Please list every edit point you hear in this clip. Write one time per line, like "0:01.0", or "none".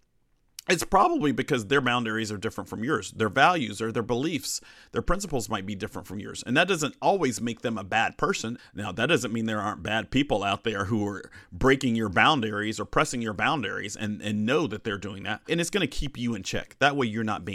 0:08.6
0:15.5